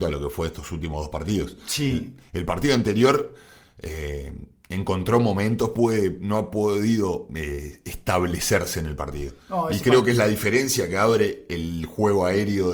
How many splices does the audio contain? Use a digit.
1